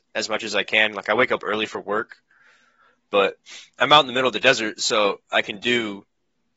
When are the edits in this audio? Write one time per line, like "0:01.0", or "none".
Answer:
0:03.7